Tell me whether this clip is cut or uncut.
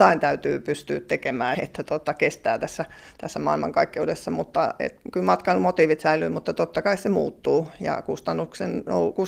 cut